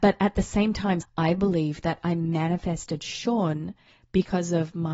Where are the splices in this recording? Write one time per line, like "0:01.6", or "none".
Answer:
0:01.0